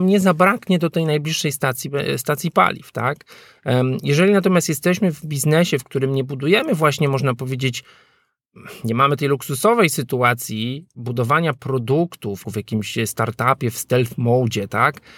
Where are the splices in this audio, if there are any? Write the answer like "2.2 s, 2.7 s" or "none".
12.4 s